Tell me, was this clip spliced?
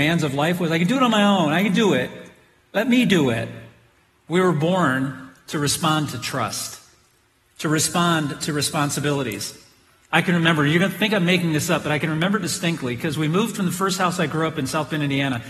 no; 0 cuts

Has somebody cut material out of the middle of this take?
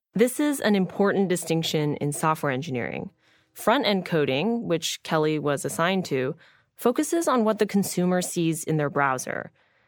no; 0 cuts

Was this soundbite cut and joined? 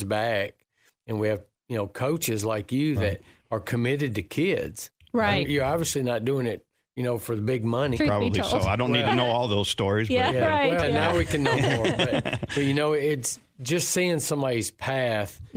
yes; 3 cuts; at 5.4 s, 8.0 s, 10.8 s

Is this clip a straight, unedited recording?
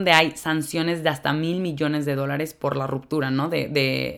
yes; 0 cuts

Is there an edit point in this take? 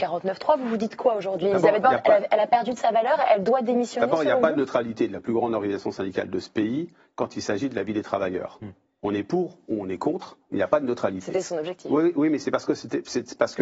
no; 0 cuts

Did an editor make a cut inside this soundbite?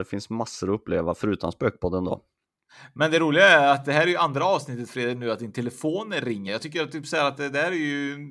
no; 0 cuts

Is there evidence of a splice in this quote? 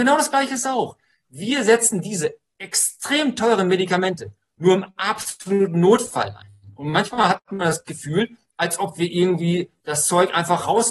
no; 0 cuts

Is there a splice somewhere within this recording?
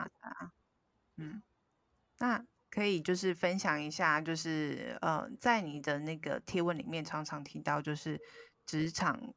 no; 0 cuts

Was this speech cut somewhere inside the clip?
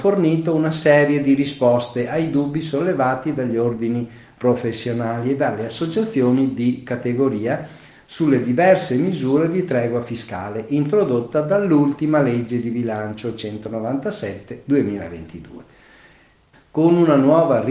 yes; 1 cut; at 16.5 s

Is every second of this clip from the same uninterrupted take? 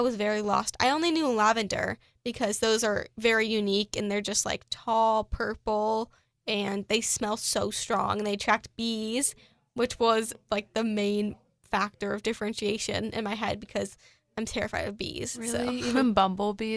yes; 0 cuts

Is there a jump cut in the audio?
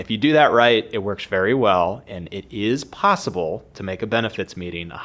no; 0 cuts

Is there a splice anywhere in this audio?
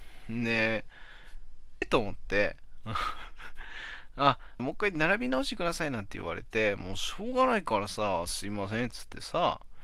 yes; 2 cuts; at 1.8 s, 4.6 s

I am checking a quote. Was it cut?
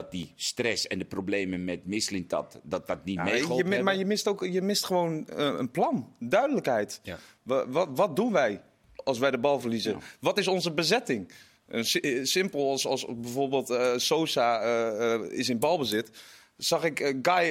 no; 0 cuts

